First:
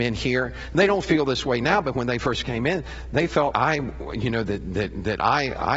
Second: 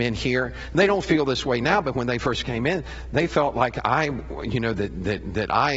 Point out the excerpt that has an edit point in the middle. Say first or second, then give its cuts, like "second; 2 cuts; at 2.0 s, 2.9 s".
first; 1 cut; at 3.5 s